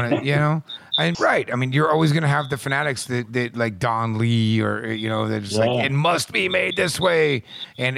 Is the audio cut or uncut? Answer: cut